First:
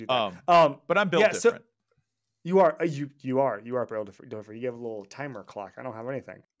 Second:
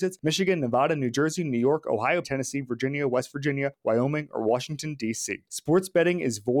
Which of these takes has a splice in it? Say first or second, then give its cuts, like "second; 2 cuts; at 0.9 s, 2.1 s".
second; 1 cut; at 2.2 s